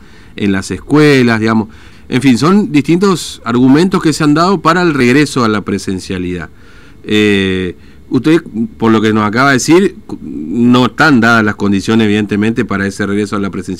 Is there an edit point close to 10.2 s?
no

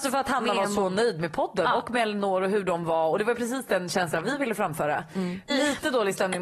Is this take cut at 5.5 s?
yes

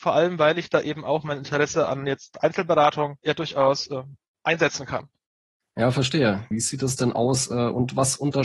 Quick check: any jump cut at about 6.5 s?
yes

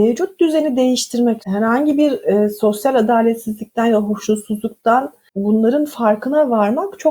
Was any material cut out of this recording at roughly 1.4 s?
yes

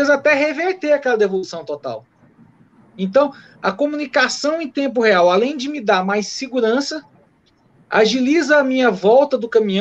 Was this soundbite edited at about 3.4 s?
no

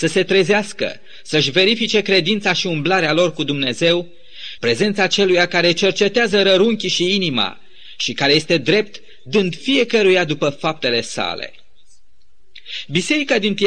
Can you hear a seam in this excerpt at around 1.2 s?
no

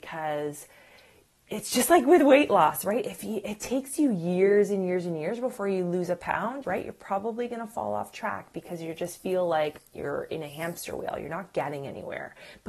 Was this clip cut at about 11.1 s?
no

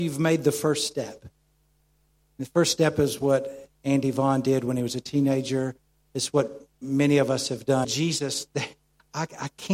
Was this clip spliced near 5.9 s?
no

